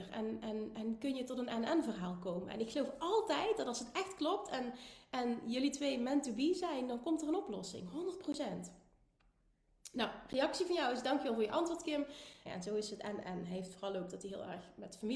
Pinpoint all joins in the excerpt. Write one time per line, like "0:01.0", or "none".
0:12.5